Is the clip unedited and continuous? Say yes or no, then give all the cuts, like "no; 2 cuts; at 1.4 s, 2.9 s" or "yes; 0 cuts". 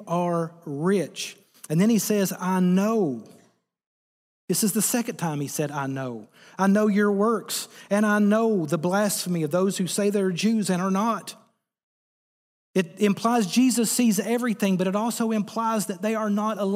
yes; 0 cuts